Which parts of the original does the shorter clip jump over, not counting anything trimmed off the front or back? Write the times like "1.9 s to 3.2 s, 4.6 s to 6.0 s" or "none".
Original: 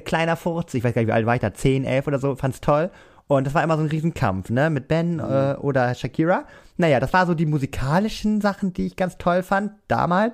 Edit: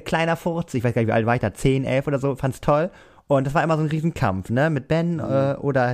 none